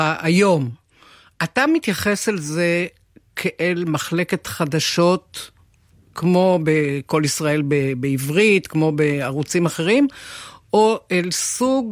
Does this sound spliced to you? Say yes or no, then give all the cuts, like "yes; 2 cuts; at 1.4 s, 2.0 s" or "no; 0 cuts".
no; 0 cuts